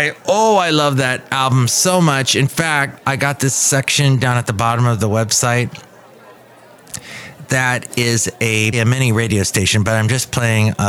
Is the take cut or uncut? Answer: cut